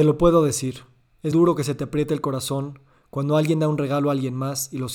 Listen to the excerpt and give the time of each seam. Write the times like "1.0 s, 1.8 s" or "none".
1.3 s